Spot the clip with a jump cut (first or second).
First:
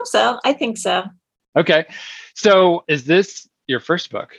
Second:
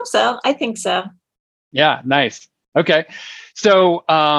first